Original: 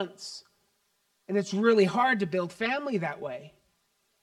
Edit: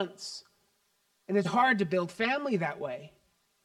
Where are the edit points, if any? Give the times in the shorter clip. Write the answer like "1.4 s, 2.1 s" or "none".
1.4 s